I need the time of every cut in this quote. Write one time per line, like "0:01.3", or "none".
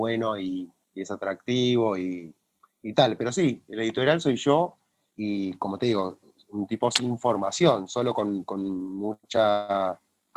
none